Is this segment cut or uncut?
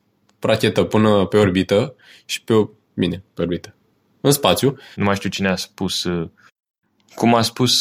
cut